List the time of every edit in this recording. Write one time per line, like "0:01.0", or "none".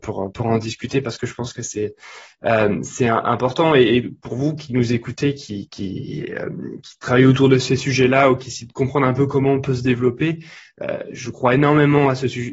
none